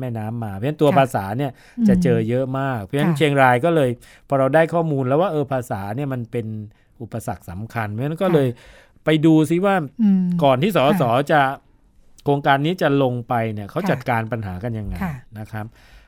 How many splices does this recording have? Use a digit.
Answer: 0